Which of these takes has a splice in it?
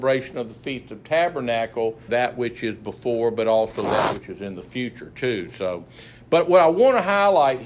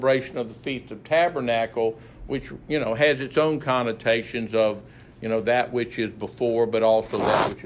first; 1 cut; at 2.1 s

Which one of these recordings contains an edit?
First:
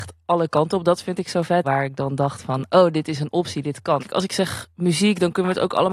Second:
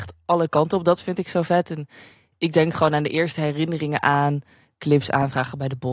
first; 2 cuts; at 1.6 s, 4.0 s

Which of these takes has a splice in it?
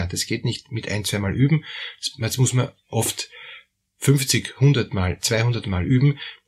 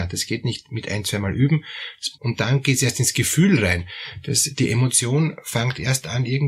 second; 1 cut; at 2.1 s

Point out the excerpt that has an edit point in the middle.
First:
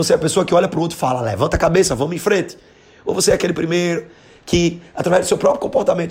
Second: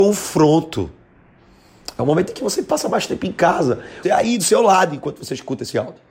second; 1 cut; at 4.0 s

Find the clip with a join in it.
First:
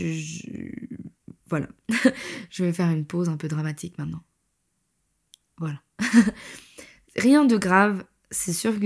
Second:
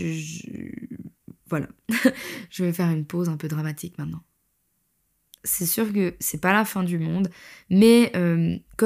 second; 1 cut; at 5.4 s

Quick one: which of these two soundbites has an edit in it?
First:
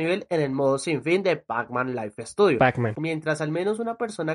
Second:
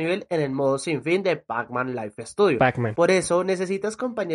first; 1 cut; at 3.0 s

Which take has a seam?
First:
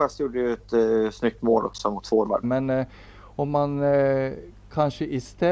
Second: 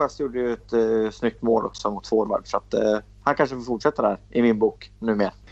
first; 1 cut; at 2.4 s

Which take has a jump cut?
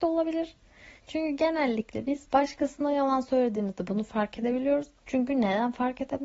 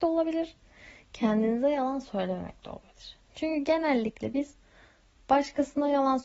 first; 3 cuts; at 1.0 s, 2.3 s, 5.0 s

